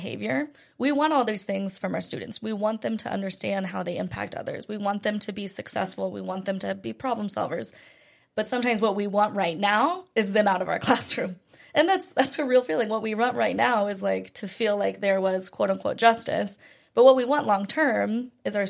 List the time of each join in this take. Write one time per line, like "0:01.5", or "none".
none